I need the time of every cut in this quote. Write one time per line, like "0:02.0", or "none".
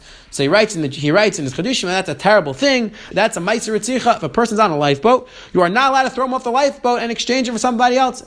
0:03.1